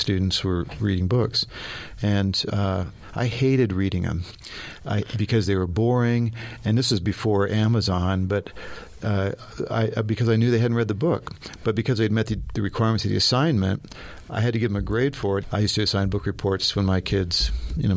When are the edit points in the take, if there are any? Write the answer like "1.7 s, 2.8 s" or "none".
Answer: 15.4 s